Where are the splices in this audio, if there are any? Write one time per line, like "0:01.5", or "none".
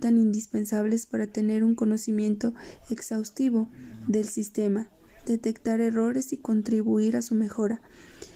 none